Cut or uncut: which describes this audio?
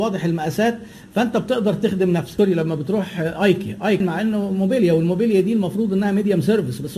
uncut